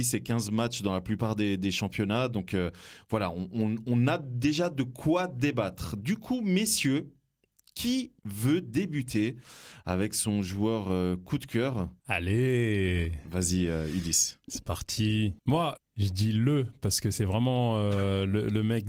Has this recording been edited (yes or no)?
yes